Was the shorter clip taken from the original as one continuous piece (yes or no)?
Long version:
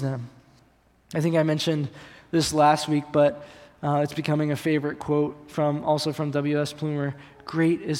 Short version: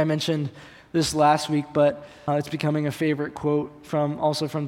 no